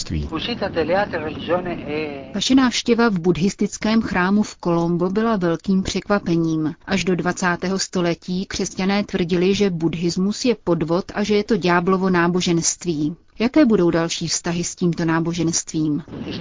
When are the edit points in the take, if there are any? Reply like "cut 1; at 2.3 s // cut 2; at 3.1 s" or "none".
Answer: none